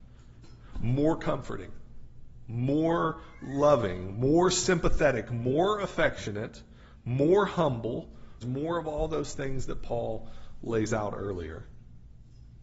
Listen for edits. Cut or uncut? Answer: cut